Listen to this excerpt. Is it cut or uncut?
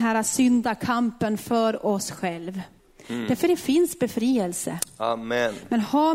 uncut